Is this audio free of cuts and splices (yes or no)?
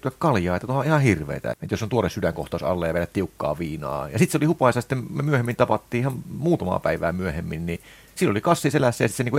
no